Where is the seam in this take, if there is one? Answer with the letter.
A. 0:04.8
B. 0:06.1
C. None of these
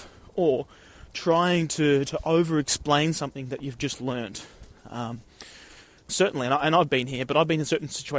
B